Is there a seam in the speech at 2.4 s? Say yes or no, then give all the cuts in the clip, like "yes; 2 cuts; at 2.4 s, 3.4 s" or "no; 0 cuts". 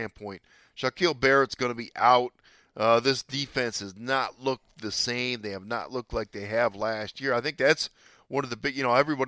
no; 0 cuts